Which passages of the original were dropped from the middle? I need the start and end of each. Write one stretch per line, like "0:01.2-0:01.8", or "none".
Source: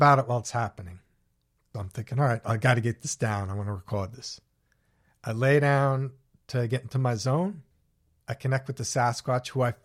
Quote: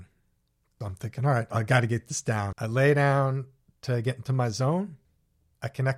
0:03.5-0:05.2